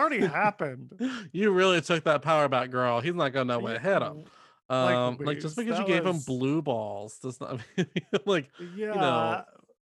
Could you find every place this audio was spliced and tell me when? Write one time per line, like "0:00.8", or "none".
0:05.2